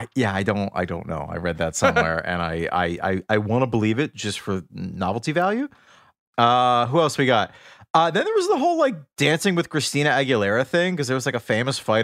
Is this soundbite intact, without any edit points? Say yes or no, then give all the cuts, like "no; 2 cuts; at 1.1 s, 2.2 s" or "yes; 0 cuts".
yes; 0 cuts